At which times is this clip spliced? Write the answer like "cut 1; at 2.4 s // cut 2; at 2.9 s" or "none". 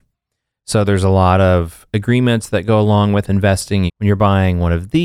cut 1; at 3.9 s